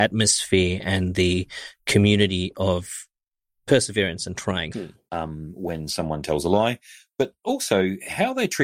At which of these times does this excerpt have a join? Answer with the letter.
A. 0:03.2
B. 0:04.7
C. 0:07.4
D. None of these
B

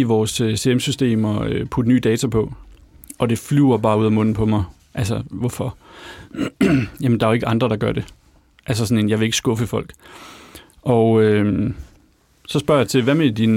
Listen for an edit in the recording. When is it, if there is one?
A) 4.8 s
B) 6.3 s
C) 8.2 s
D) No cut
A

